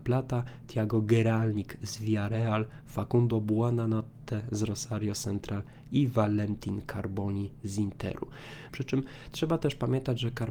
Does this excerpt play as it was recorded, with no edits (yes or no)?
no